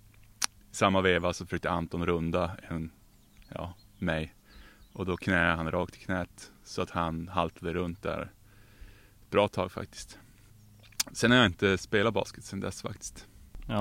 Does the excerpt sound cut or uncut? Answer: uncut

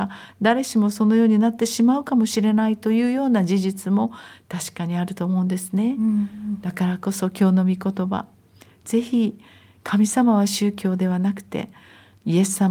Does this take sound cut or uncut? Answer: uncut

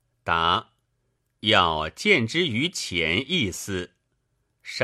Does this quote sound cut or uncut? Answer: uncut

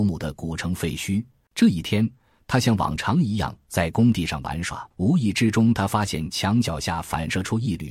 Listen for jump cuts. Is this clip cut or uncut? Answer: cut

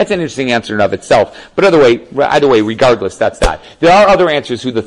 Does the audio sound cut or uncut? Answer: uncut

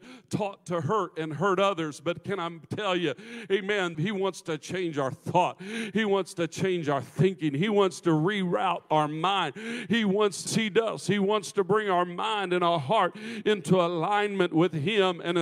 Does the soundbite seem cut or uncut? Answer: cut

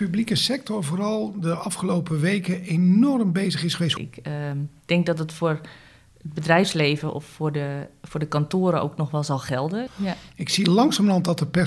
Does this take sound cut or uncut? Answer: cut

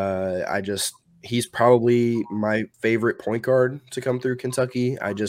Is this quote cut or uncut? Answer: cut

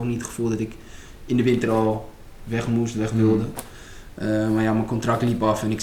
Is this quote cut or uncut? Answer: uncut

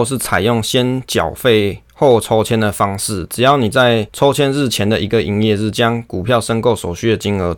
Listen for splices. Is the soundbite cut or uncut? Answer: uncut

